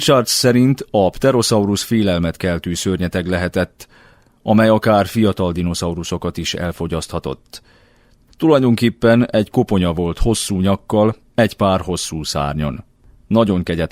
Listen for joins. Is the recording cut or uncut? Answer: uncut